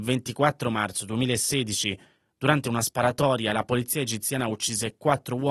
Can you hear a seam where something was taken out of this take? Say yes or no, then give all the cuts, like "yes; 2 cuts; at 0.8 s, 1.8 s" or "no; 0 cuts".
no; 0 cuts